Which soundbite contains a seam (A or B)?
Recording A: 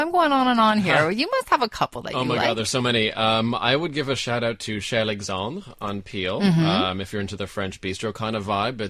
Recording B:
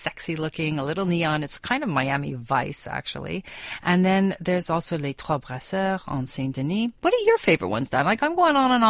B